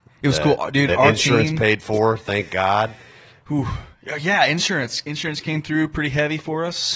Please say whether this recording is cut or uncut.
uncut